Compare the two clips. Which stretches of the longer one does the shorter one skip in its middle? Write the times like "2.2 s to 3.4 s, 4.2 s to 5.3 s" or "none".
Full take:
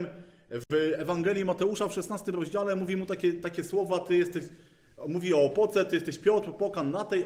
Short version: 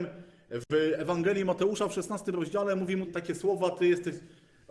3.1 s to 3.3 s

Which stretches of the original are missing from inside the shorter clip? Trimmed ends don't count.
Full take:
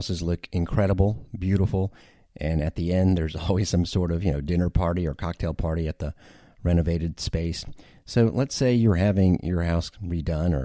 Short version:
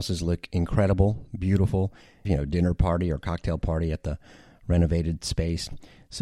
2.3 s to 4.2 s

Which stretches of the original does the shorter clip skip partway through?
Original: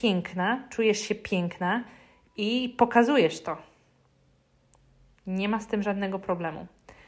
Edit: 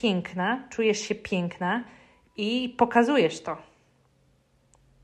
none

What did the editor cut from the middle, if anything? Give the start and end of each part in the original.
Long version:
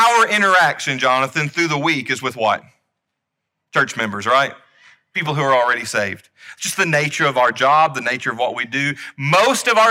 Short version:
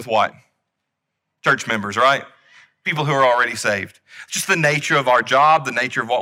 none

